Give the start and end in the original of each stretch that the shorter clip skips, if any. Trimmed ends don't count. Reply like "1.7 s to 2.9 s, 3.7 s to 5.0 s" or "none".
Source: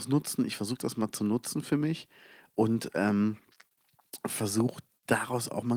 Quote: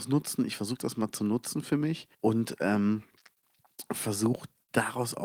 2.1 s to 2.5 s